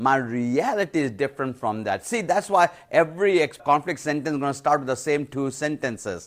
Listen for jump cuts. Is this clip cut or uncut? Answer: cut